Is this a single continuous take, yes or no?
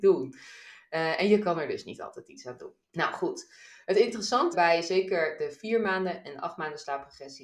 no